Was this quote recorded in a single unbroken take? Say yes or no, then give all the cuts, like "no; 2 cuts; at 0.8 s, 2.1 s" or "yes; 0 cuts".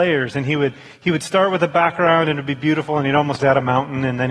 no; 1 cut; at 3.4 s